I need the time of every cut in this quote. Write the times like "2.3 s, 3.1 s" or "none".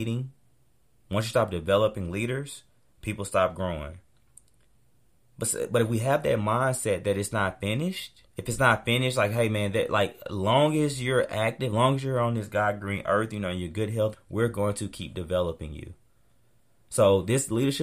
8.3 s, 14.1 s

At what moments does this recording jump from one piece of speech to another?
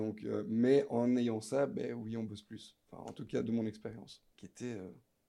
4.3 s

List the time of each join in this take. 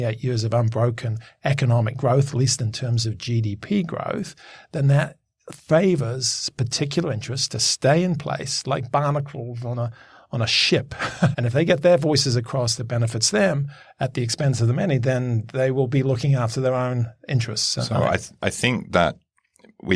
11.3 s

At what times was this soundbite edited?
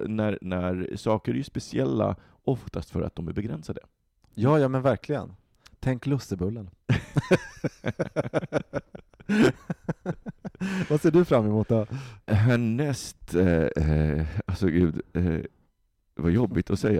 12.3 s

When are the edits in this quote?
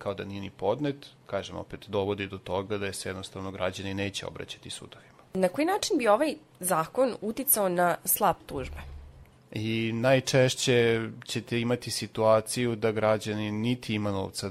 1.2 s, 9.4 s

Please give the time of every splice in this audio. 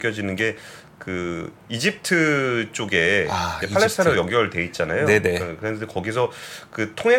none

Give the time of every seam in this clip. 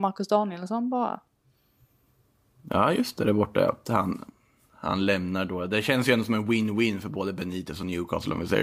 none

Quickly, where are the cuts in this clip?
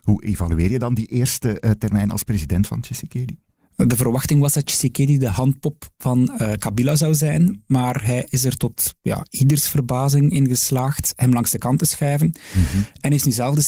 none

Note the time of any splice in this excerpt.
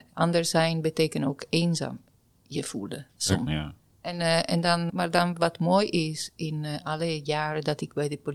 3.5 s, 4.9 s

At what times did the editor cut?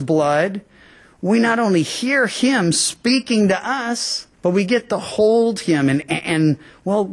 4.3 s

